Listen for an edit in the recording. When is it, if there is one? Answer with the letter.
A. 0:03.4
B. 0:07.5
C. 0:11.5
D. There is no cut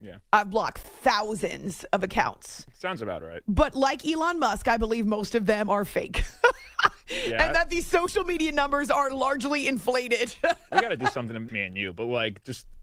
C